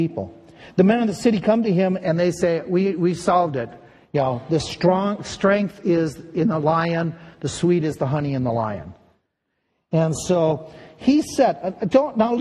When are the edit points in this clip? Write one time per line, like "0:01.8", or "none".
none